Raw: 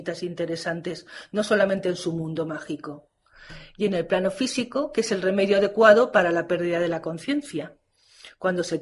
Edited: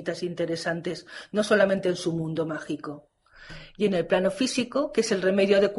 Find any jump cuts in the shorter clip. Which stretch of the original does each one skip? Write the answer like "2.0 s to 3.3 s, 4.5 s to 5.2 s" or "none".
none